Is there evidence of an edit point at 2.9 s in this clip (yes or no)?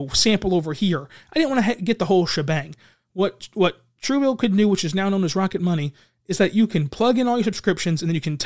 no